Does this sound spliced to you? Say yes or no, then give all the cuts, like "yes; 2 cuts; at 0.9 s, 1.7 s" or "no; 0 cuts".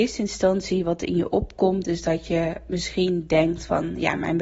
no; 0 cuts